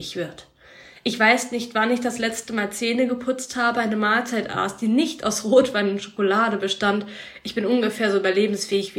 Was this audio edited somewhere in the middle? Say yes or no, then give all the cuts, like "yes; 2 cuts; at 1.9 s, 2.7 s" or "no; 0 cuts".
no; 0 cuts